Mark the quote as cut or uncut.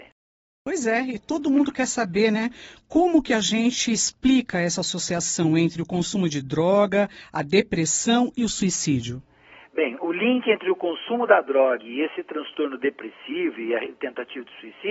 uncut